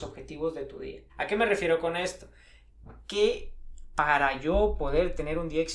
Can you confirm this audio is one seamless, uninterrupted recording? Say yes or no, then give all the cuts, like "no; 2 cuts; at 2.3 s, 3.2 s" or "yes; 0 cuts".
no; 1 cut; at 1.1 s